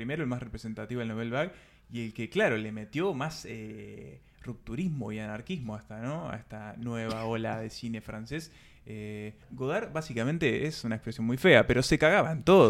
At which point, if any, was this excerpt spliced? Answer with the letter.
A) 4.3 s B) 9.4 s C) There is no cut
B